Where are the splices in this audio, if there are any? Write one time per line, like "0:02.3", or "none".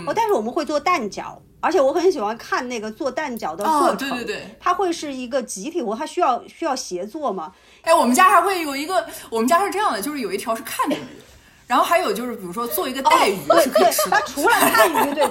0:07.8